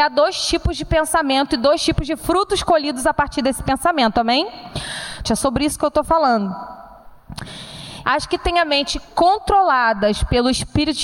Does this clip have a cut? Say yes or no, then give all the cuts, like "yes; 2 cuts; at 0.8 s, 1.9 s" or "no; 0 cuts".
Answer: yes; 2 cuts; at 5.2 s, 8.0 s